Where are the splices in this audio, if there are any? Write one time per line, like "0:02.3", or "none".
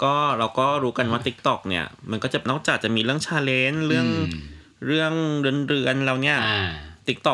0:02.5